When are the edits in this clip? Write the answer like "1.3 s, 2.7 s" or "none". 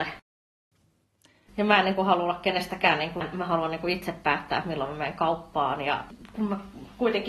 1.5 s, 3.2 s